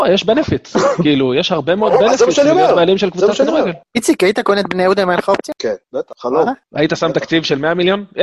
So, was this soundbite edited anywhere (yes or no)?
no